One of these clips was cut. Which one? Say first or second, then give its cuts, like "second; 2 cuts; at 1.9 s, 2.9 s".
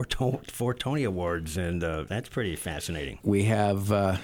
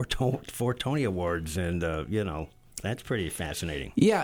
first; 2 cuts; at 2.1 s, 3.2 s